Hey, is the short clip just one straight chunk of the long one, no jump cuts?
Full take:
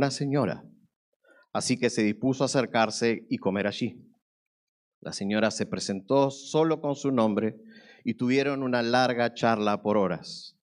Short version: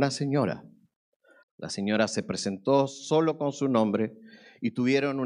no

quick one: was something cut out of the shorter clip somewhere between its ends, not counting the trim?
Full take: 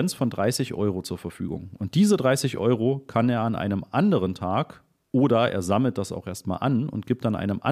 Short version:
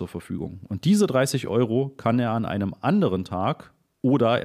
no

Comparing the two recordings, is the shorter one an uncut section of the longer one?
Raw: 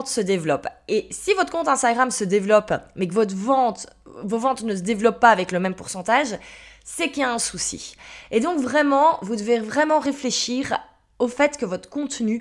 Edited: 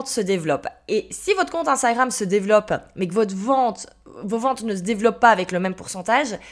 yes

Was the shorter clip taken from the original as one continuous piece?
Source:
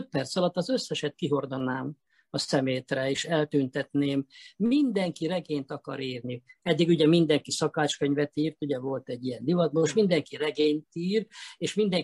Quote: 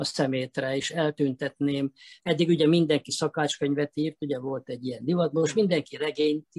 no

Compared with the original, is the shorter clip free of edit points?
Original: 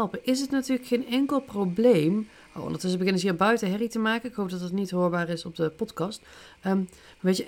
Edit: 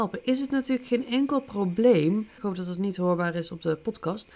no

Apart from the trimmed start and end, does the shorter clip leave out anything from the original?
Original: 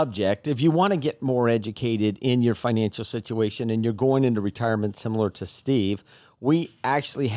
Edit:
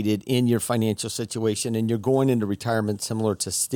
no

